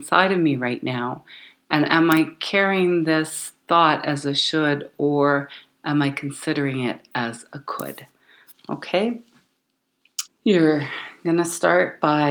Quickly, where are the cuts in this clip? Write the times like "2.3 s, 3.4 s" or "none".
10.3 s

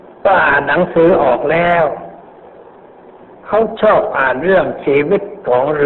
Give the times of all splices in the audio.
none

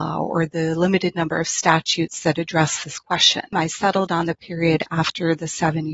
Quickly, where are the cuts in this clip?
3.5 s

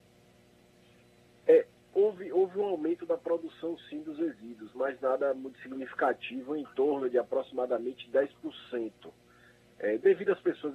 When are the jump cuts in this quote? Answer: none

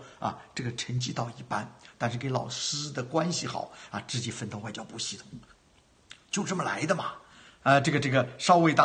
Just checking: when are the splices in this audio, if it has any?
7.5 s

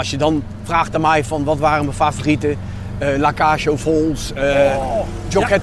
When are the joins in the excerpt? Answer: none

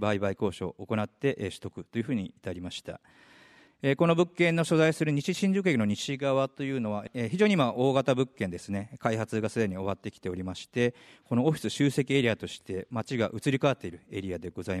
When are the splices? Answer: 3.7 s

